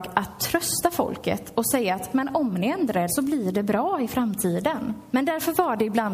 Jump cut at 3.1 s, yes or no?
yes